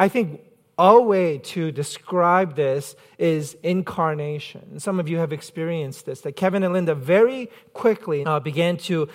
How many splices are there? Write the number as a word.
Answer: one